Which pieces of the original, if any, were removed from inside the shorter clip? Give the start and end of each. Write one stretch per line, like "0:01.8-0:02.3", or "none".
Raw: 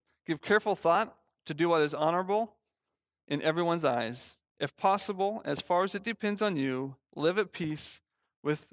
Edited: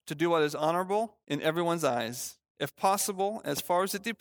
0:02.6-0:03.2